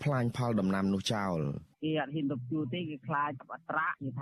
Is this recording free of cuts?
no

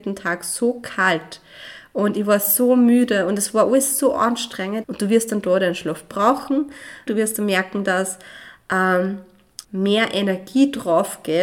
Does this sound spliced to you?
yes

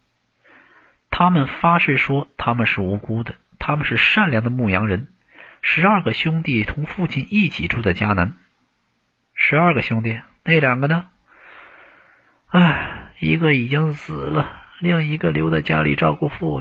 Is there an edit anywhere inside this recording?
no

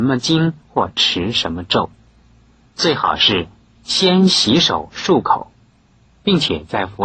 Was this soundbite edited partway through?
yes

